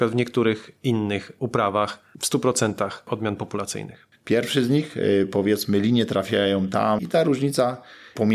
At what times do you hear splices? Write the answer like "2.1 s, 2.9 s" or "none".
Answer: 4.1 s, 7.0 s